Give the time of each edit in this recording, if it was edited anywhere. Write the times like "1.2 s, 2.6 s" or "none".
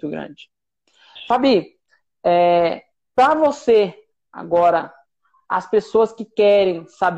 none